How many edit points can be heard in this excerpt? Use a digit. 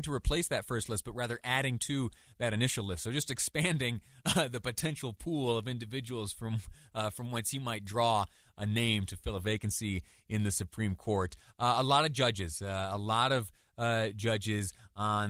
0